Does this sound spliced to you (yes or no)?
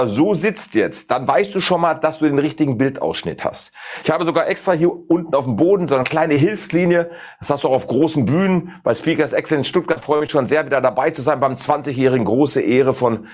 no